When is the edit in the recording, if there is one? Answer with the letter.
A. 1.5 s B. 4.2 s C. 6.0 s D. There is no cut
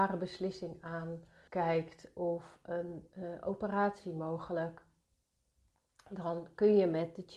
A